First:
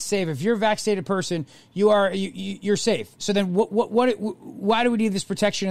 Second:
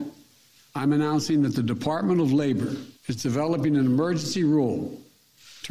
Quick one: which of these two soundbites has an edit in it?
second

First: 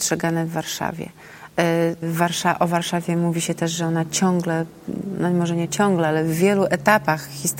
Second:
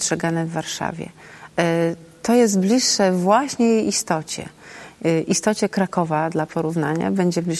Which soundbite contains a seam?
first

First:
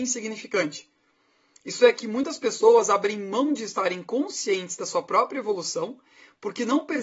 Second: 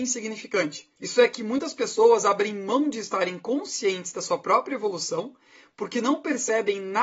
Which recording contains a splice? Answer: second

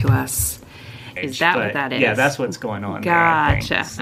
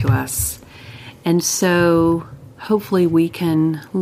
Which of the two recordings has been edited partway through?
first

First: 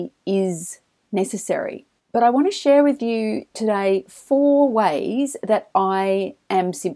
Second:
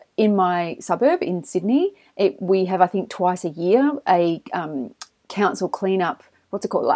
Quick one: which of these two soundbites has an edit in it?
first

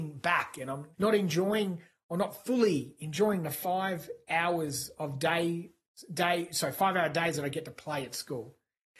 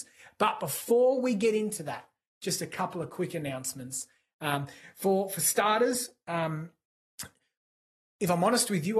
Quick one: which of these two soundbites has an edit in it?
first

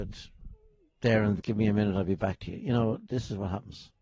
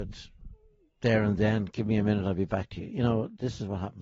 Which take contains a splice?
first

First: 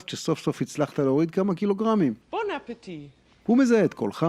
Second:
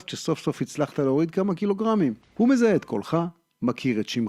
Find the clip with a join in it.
second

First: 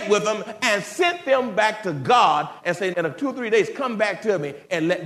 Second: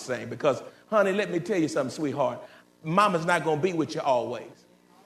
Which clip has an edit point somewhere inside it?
first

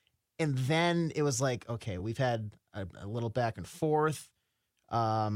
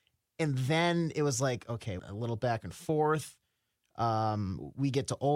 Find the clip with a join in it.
second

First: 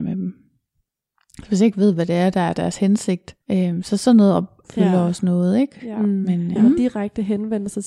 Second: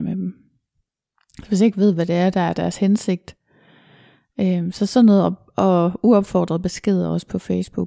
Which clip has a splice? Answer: first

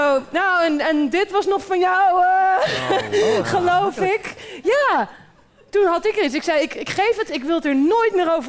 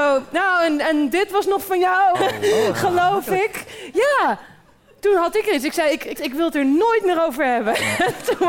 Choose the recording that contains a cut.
second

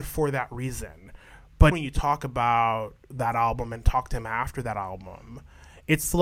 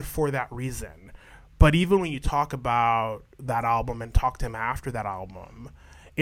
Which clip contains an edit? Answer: first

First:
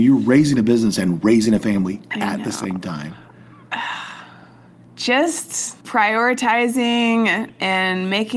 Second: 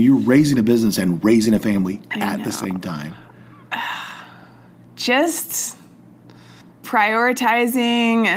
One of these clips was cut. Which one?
first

